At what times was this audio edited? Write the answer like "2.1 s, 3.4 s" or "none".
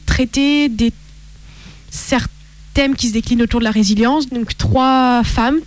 2.6 s, 4.3 s